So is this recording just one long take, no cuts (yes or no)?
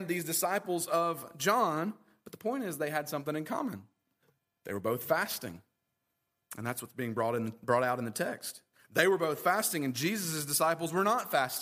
yes